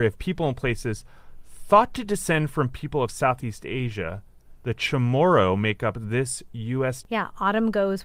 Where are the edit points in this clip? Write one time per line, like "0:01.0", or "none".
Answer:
0:07.0